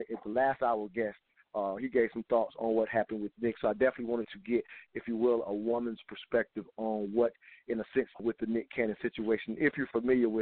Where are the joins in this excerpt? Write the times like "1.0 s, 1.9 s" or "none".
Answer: 8.2 s

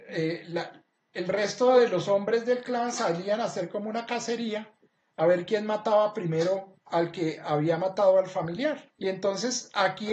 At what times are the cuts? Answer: 8.9 s

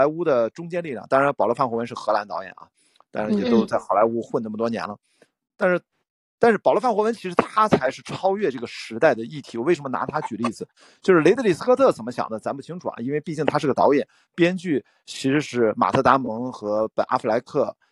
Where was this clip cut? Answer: none

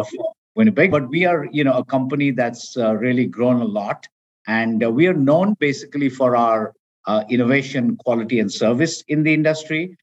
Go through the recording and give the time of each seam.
0.9 s

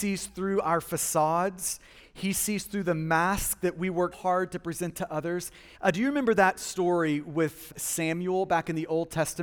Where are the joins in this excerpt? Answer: 4.1 s, 5.7 s, 7.7 s

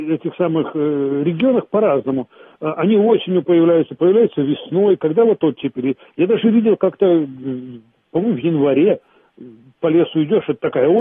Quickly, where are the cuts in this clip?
none

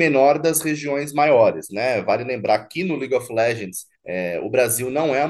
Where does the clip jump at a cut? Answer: 1.7 s, 3.9 s

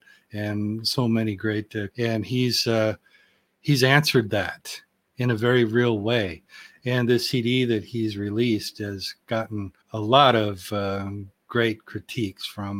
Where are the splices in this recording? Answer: 1.9 s, 9.8 s

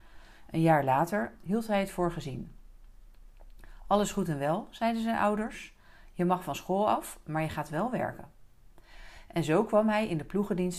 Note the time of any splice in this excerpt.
1.4 s

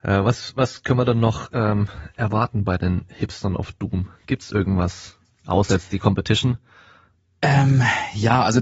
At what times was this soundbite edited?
none

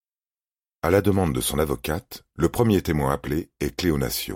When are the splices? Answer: none

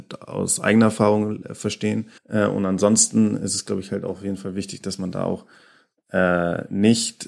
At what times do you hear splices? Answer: 2.2 s

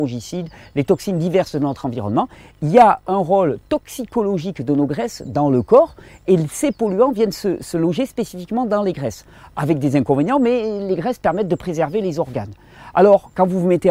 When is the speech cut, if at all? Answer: none

